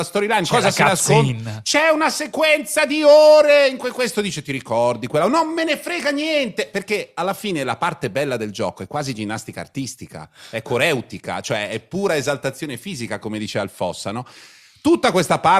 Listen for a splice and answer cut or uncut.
uncut